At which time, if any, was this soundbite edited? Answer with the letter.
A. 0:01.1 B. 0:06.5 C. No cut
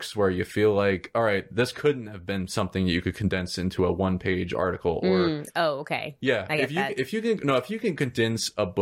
C